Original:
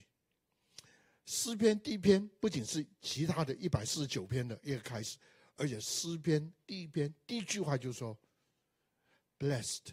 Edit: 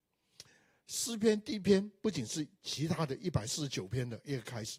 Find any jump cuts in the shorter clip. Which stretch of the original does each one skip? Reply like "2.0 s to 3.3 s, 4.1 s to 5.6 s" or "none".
none